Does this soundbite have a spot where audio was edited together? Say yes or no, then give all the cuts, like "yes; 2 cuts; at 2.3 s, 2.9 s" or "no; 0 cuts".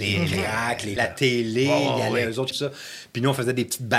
yes; 2 cuts; at 1.0 s, 2.5 s